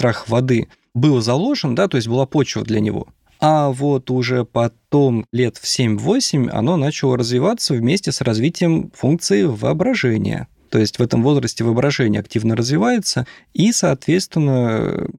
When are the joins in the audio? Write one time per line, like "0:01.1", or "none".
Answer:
none